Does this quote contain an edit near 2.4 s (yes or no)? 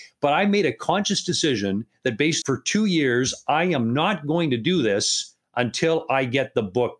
yes